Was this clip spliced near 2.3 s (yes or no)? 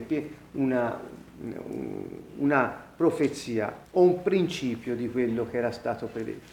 no